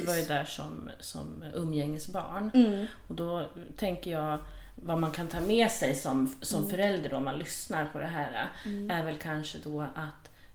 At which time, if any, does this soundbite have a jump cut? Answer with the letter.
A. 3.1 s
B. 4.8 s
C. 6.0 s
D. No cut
D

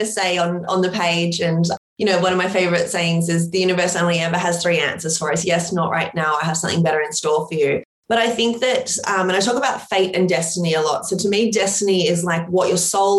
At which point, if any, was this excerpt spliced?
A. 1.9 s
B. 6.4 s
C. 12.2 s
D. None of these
D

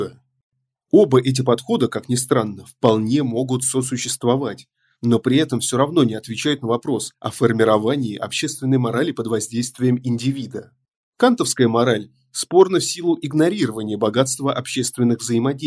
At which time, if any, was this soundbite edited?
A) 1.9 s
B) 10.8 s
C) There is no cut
C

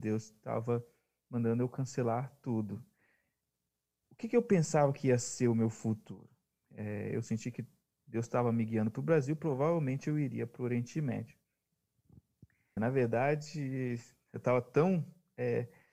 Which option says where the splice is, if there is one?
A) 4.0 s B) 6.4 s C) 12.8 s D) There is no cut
C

